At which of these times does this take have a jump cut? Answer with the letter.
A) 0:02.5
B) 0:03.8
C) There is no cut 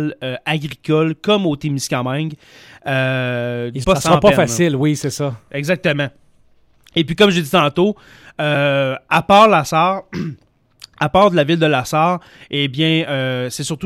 B